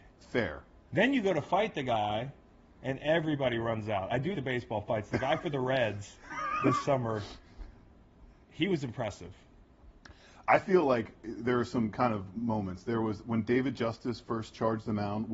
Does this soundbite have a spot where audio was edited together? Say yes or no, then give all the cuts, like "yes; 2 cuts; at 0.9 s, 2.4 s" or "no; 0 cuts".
yes; 1 cut; at 4.3 s